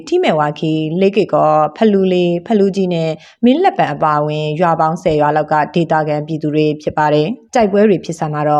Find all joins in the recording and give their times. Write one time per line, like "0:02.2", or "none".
0:07.5